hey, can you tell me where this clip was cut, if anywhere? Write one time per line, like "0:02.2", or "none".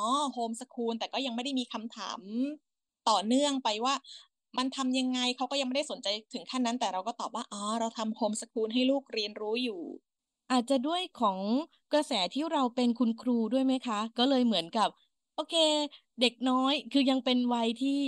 none